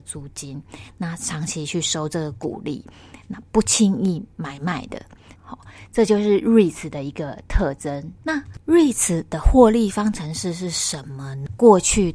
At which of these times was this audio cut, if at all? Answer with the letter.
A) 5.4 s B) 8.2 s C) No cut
A